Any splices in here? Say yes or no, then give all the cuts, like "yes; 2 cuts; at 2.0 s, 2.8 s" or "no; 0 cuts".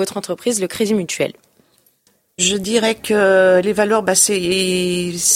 yes; 1 cut; at 2.4 s